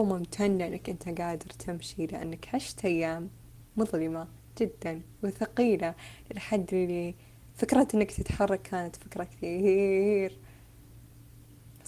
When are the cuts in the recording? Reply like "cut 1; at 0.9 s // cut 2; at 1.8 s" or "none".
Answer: none